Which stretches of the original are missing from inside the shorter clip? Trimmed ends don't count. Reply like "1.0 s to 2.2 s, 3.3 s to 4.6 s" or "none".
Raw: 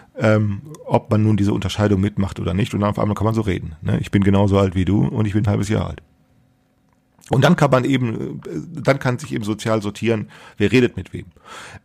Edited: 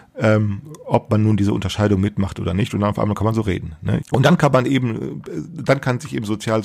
4.0 s to 7.2 s